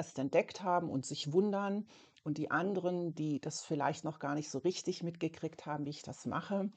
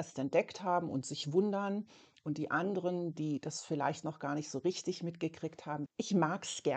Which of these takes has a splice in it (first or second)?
second